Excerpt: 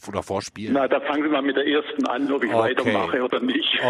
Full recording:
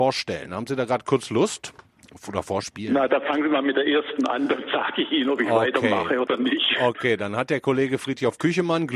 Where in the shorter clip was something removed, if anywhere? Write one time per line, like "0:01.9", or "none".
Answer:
0:02.3

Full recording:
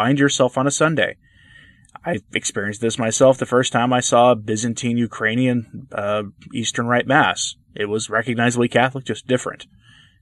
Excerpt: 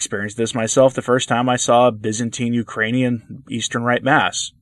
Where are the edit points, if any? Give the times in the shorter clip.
0:03.4

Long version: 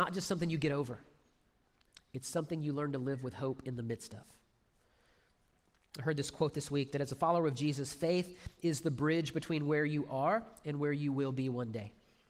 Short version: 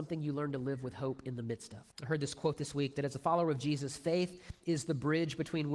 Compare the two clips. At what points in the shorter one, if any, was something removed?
0:01.9

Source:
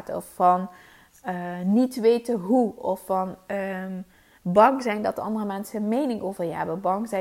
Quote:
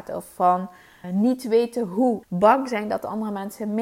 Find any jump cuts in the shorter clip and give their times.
0:01.0
0:02.2

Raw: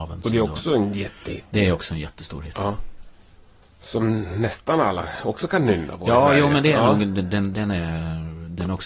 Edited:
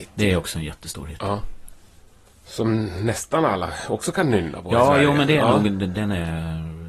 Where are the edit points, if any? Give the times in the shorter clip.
0:05.9

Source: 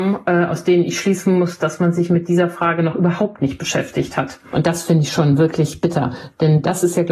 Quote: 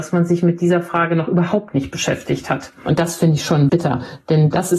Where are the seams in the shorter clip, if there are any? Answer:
0:03.7

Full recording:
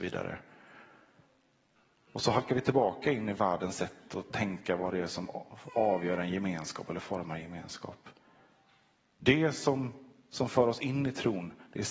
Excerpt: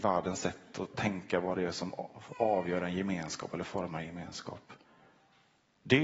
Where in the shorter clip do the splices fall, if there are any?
none

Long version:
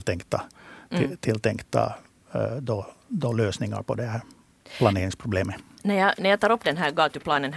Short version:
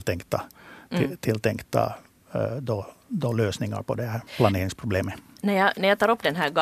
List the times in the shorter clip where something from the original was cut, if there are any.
0:04.3

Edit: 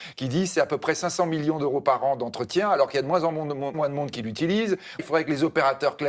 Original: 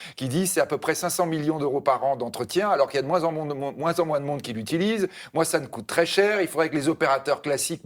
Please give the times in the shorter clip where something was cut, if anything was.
0:03.7
0:05.0

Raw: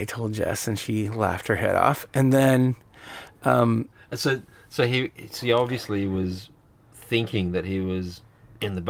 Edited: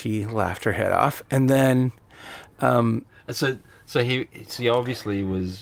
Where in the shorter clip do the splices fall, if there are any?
none

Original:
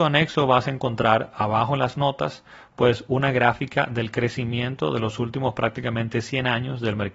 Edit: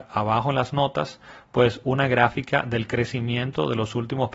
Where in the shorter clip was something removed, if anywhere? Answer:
none

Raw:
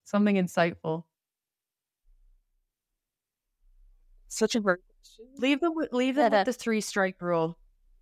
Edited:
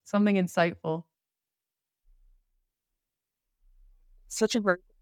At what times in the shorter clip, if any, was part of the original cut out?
none

